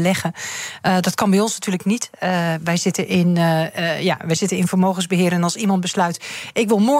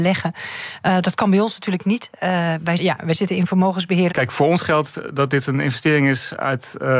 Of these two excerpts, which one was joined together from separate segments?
second; 2 cuts; at 2.8 s, 4.1 s

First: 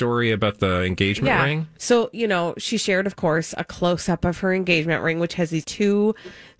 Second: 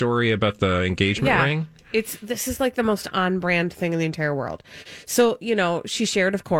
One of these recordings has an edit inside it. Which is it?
first; 2 cuts; at 1.8 s, 5.6 s

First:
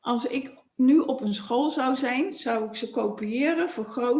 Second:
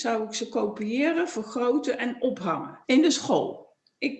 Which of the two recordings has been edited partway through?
second; 1 cut; at 2.8 s

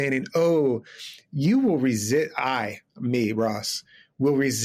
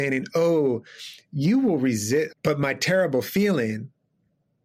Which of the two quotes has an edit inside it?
second; 1 cut; at 2.3 s

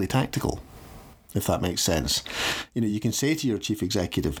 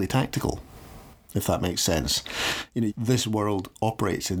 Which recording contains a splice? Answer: second; 1 cut; at 2.9 s

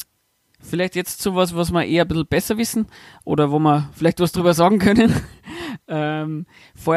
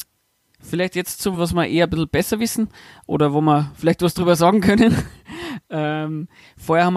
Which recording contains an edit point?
second; 1 cut; at 1.3 s

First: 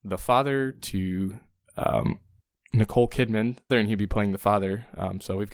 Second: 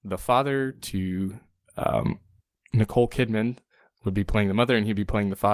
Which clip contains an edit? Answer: first; 1 cut; at 3.7 s

